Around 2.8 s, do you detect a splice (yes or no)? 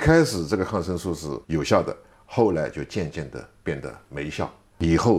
no